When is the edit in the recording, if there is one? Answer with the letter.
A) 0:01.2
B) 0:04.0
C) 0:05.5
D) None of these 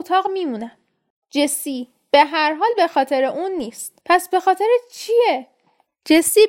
B